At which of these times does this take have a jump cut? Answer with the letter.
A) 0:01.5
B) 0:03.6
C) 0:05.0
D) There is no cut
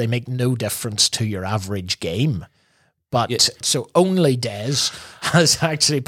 B